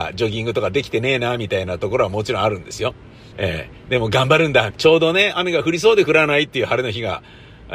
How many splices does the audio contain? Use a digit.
2